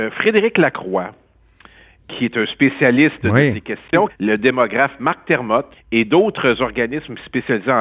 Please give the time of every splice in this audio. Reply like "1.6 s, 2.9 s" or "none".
4.1 s, 5.7 s

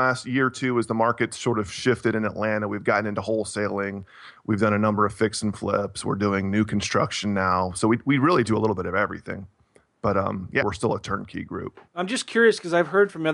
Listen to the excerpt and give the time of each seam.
10.6 s, 11.9 s

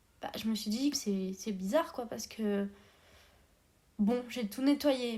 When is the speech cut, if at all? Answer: 0.9 s

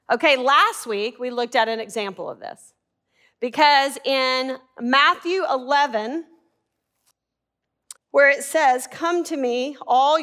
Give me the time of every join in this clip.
8.0 s

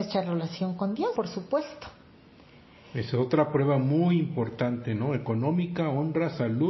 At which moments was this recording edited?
1.2 s

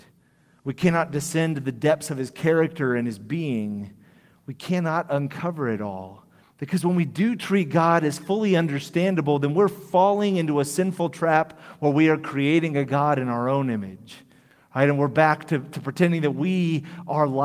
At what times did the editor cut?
6.4 s

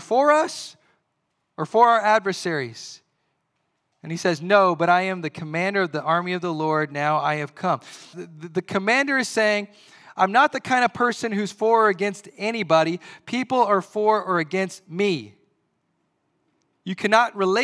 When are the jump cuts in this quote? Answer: 8.1 s

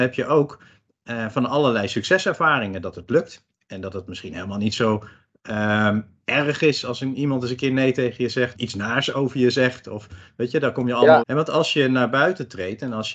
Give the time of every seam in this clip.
8.5 s, 11.2 s

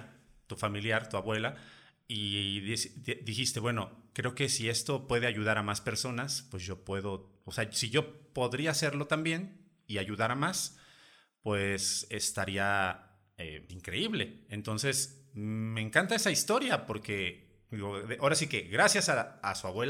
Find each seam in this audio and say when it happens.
13.7 s

